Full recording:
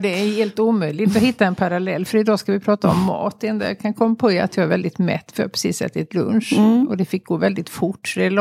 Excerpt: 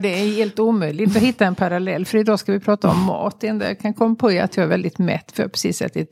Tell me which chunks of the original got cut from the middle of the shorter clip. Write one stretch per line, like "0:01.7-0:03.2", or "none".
none